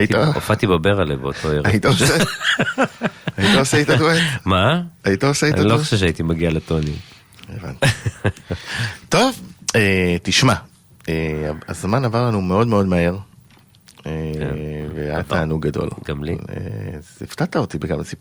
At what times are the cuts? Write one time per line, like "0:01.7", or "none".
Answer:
none